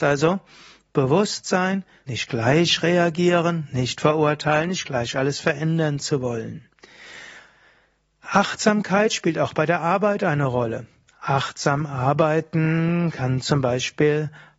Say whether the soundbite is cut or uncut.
cut